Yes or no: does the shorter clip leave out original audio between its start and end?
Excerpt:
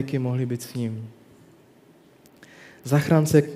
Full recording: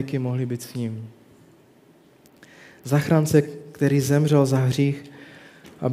no